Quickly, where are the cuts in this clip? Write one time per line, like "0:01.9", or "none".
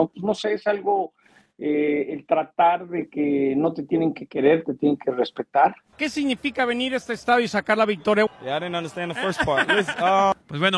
0:05.9
0:08.3